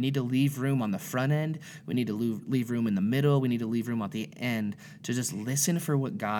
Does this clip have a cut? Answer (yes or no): no